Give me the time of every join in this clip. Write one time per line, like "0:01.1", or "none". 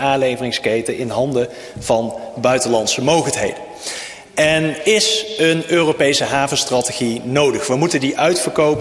0:04.8